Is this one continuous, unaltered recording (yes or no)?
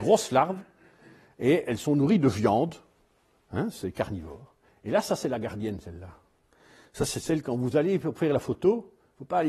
yes